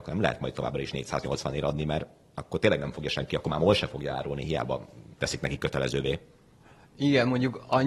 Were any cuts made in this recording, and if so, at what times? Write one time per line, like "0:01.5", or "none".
0:05.2

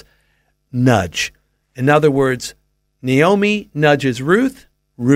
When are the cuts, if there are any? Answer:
none

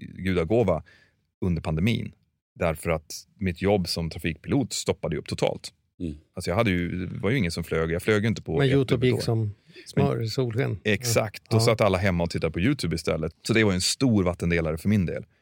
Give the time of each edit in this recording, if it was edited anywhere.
0:13.3

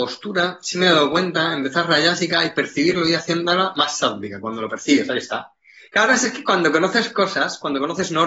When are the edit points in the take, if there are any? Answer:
none

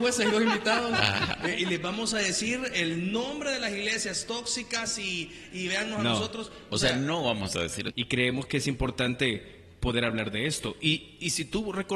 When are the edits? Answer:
0:07.9

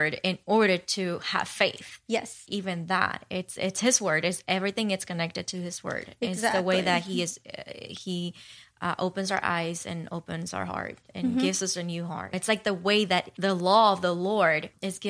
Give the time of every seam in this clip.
none

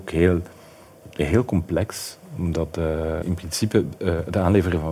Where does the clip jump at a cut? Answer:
0:03.2

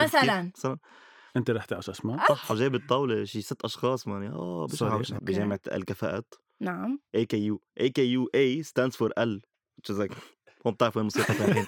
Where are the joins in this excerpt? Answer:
0:02.3
0:05.2

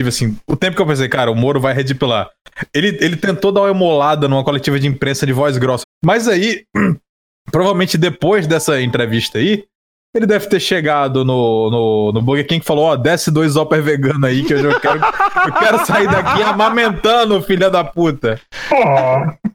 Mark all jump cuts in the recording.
0:05.8

